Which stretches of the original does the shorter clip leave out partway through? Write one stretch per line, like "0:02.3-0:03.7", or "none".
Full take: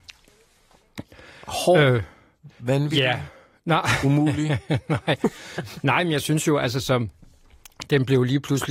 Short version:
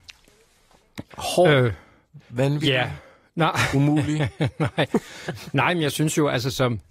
0:01.1-0:01.4